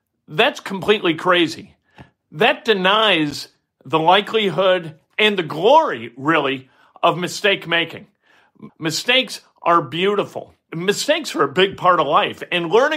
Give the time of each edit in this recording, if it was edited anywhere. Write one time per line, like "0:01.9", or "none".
0:08.7
0:10.7